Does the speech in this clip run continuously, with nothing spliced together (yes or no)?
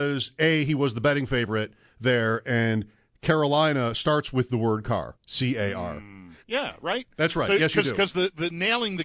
no